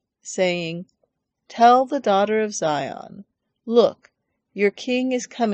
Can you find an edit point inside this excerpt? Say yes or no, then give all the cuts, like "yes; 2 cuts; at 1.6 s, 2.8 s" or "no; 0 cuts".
no; 0 cuts